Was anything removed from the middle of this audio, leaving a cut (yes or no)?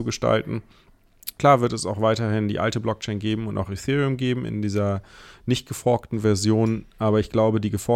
yes